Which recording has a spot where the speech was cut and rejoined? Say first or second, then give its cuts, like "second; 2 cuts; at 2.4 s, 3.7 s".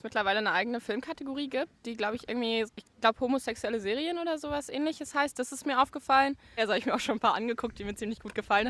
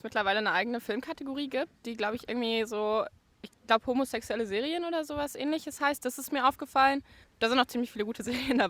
first; 2 cuts; at 2.7 s, 6.6 s